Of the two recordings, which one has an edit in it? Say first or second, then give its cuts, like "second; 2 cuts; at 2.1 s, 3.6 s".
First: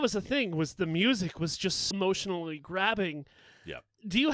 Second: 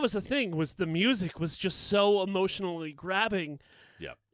first; 1 cut; at 1.9 s